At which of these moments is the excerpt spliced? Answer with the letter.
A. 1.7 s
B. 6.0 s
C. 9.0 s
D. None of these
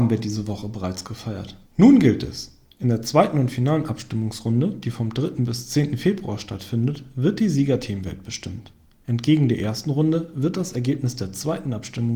A